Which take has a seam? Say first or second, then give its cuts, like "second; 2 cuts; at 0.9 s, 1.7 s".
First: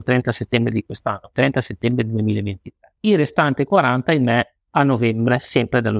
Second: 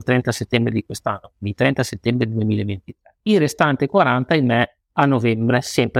first; 1 cut; at 1.3 s